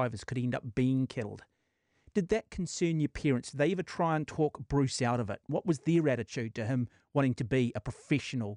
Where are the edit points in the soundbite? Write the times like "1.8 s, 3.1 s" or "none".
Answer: none